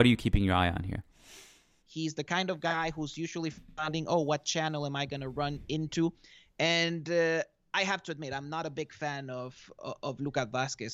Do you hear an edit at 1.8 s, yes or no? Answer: yes